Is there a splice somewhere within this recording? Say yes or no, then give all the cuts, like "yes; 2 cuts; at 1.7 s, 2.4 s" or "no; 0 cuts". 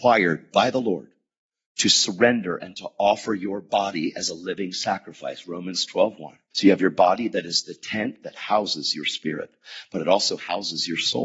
yes; 1 cut; at 6.5 s